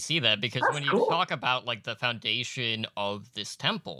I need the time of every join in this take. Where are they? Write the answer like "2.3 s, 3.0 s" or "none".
none